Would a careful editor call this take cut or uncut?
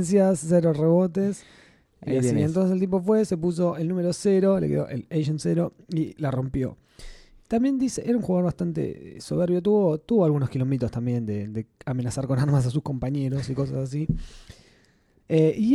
uncut